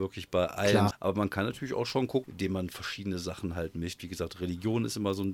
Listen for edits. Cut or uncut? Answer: cut